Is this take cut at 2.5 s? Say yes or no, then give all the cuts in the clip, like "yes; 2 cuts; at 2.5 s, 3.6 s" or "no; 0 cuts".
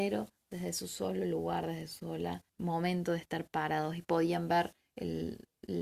yes; 1 cut; at 2.5 s